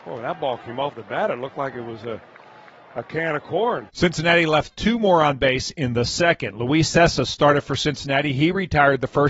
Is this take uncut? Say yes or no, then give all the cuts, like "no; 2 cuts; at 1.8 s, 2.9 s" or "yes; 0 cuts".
no; 1 cut; at 3.9 s